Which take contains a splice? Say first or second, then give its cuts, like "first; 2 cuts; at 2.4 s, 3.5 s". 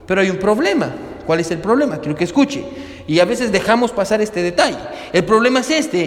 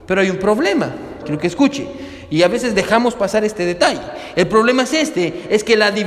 second; 1 cut; at 1.2 s